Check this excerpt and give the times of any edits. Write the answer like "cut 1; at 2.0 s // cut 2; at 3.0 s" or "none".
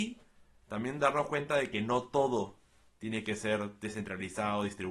none